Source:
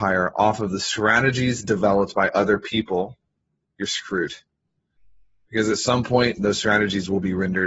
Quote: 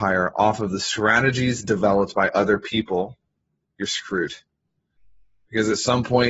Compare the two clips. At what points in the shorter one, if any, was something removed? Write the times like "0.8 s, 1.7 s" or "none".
none